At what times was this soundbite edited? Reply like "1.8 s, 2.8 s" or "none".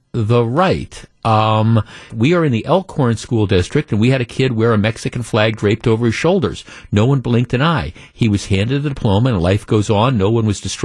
2.1 s